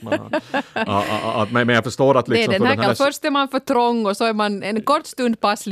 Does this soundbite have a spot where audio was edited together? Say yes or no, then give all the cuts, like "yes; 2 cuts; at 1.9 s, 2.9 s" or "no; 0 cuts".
yes; 1 cut; at 2.8 s